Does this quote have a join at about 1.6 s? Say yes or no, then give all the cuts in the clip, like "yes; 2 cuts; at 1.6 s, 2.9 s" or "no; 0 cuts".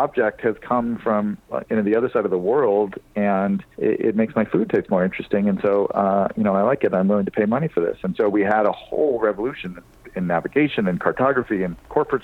no; 1 cut; at 3.7 s